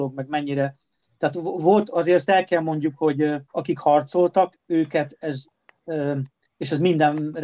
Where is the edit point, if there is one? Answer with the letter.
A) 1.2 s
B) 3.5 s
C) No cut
B